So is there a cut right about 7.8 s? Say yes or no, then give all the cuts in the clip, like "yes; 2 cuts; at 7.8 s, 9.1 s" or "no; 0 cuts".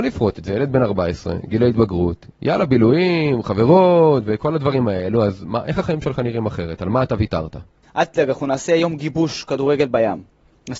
yes; 1 cut; at 7.8 s